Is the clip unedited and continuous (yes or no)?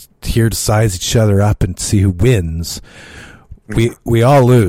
yes